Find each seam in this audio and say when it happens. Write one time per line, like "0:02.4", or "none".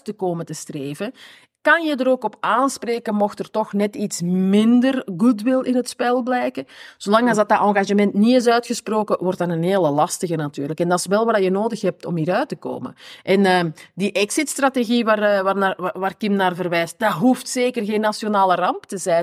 none